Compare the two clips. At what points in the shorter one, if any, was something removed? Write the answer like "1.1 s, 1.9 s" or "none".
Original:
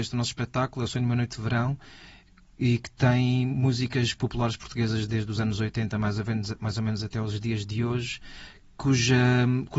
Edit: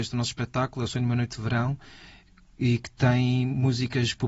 none